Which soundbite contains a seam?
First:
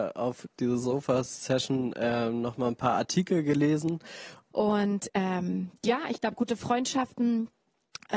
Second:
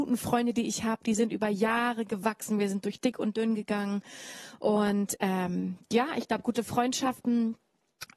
first; 1 cut; at 4.5 s

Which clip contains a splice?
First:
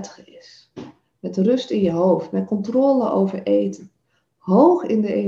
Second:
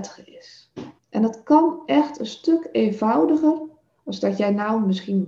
second; 1 cut; at 1.0 s

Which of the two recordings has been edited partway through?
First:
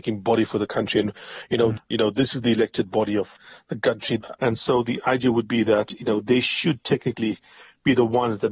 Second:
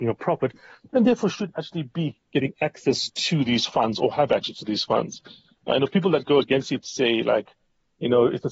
first; 2 cuts; at 1.8 s, 4.4 s

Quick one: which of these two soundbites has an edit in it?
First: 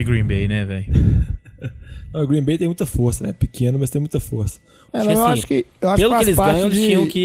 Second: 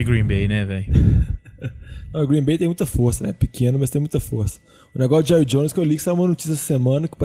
first; 1 cut; at 4.9 s

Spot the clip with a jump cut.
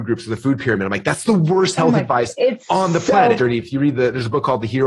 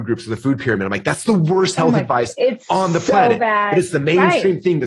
first; 1 cut; at 3.4 s

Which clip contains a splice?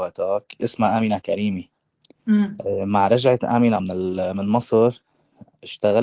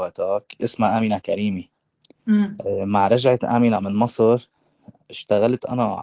second; 1 cut; at 3.8 s

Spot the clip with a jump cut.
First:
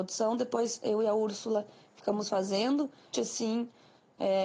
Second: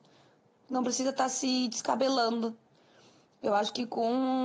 first; 1 cut; at 3.1 s

